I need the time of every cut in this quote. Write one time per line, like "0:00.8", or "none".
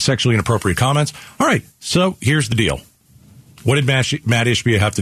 none